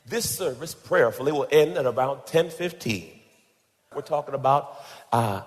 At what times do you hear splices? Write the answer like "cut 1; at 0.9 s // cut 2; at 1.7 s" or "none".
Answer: cut 1; at 3.9 s